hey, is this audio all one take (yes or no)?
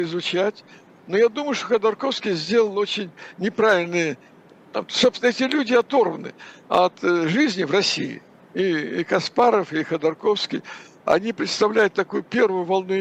yes